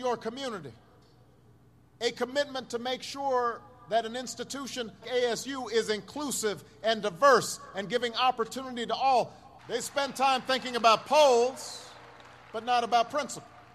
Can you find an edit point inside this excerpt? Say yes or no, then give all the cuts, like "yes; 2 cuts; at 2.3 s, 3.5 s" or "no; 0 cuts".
yes; 2 cuts; at 5.0 s, 9.6 s